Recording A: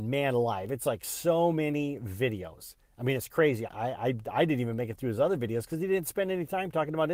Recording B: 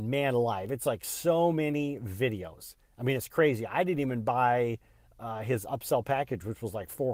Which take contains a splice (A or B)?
A